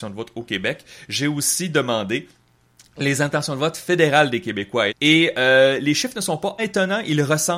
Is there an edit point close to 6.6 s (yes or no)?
yes